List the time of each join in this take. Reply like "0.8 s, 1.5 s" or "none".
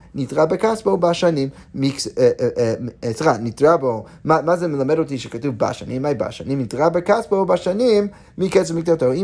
none